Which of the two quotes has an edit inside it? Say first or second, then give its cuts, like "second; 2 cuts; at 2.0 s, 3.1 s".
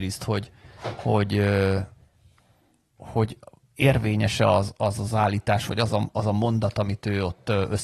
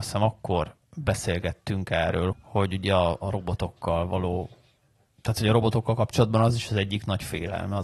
second; 1 cut; at 2.3 s